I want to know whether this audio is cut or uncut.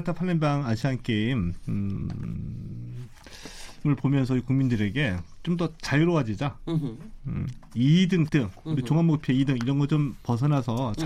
cut